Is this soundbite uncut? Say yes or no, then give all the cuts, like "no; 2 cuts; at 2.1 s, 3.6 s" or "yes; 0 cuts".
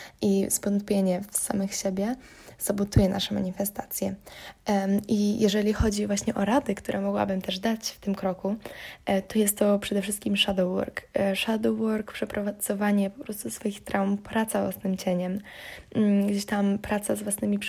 yes; 0 cuts